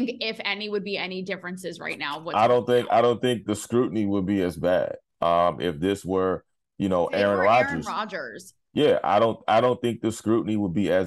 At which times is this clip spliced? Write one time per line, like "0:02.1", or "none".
none